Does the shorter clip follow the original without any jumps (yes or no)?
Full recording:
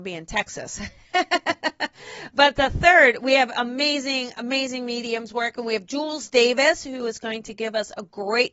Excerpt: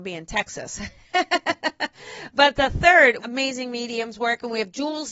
no